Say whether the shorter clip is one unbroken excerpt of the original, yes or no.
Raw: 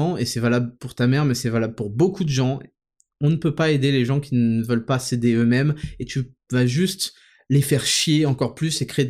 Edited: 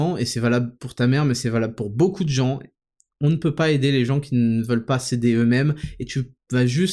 yes